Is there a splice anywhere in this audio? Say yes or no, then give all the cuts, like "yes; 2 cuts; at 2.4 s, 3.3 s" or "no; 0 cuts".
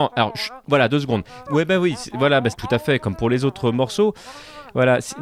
yes; 2 cuts; at 1.5 s, 2.5 s